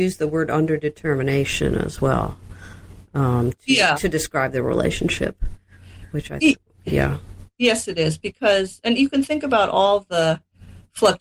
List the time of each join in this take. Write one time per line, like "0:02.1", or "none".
none